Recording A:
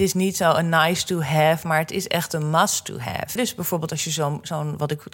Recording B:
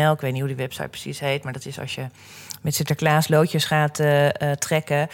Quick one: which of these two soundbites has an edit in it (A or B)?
A